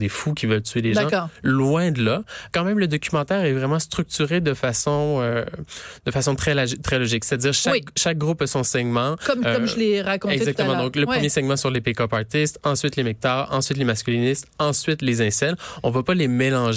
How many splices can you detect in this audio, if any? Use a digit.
1